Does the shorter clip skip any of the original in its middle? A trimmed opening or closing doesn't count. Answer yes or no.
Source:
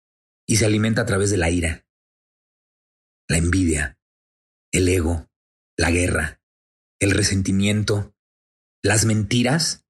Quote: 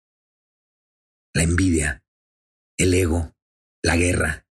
no